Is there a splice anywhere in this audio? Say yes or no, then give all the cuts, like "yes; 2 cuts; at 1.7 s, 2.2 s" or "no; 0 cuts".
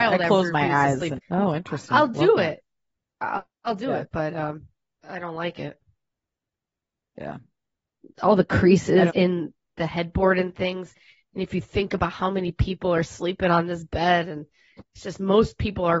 yes; 3 cuts; at 1.1 s, 5.0 s, 9.1 s